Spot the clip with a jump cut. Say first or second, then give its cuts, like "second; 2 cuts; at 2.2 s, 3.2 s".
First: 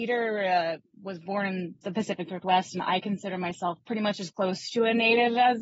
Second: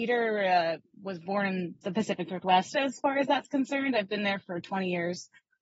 second; 1 cut; at 2.7 s